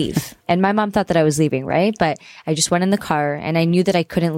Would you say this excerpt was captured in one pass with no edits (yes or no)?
yes